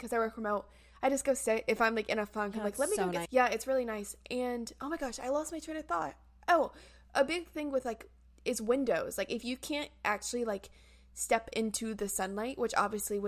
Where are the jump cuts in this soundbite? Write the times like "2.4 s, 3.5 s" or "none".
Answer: 3.2 s